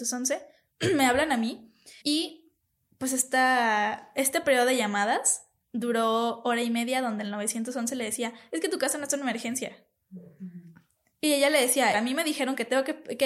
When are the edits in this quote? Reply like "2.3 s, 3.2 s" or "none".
2.0 s, 11.9 s